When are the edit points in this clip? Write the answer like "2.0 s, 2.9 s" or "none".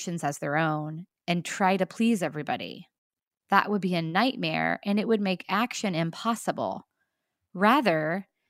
none